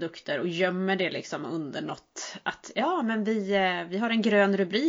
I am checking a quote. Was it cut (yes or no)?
no